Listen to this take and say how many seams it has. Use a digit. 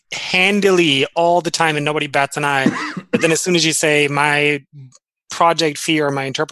0